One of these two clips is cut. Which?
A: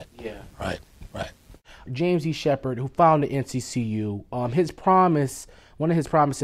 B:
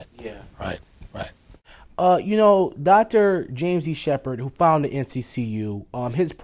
A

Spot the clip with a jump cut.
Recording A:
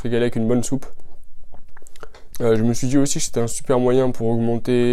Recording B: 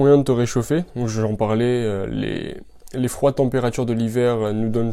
A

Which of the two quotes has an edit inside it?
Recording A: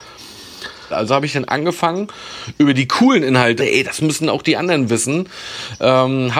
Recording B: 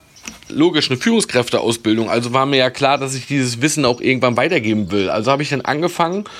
A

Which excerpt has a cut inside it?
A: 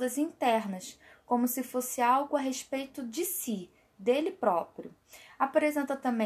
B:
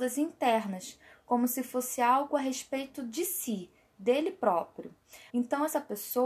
B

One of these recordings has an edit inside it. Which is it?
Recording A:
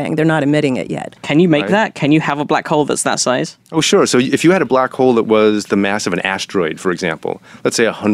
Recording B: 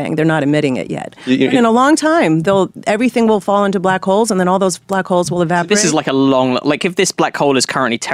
A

